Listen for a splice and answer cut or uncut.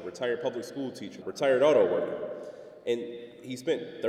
cut